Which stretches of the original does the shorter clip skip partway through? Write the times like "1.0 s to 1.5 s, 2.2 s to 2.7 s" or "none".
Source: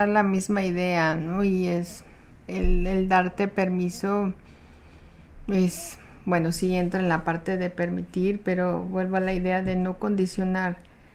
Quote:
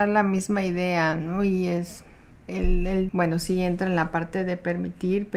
3.1 s to 6.2 s